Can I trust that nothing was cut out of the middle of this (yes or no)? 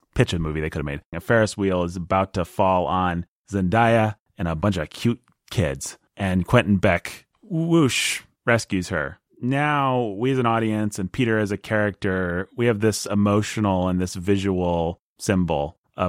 no